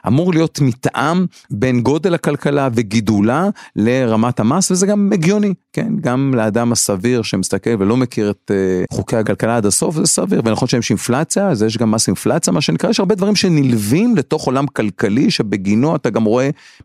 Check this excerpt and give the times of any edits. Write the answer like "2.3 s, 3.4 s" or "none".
8.9 s